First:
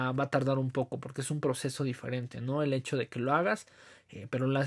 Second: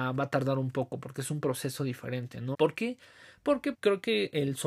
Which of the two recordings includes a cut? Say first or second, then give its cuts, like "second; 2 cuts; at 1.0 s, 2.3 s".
second; 2 cuts; at 2.5 s, 3.7 s